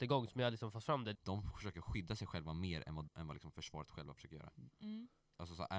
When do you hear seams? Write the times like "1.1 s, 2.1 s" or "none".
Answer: 1.1 s, 3.1 s